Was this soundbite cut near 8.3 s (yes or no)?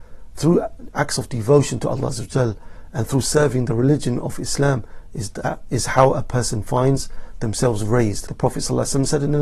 yes